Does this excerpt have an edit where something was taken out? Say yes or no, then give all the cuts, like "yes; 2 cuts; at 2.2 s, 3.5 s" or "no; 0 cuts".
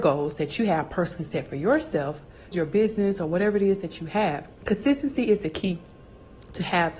yes; 2 cuts; at 2.5 s, 4.5 s